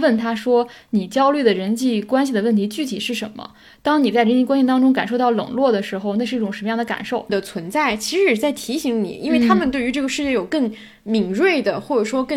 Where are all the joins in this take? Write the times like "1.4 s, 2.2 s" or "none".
7.3 s